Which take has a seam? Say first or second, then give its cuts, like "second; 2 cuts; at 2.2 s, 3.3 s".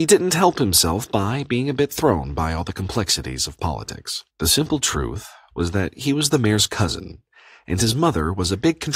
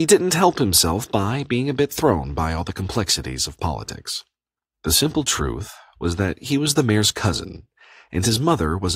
first; 1 cut; at 4.3 s